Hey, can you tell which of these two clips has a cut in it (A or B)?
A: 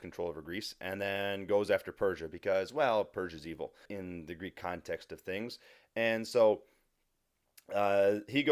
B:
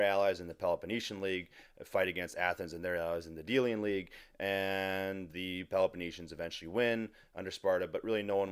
A